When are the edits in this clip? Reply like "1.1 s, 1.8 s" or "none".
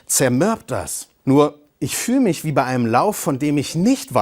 1.2 s